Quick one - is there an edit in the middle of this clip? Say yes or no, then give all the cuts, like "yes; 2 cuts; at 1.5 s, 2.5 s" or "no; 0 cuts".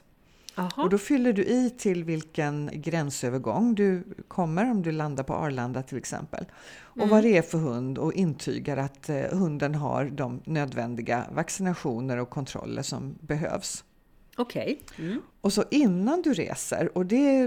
yes; 2 cuts; at 2.7 s, 15.3 s